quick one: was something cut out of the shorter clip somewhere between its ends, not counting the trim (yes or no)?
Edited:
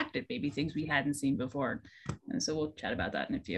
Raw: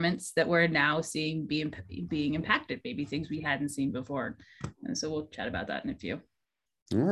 no